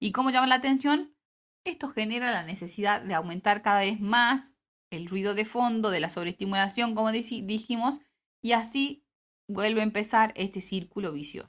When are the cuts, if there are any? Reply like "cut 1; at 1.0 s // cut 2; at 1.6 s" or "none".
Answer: cut 1; at 1.5 s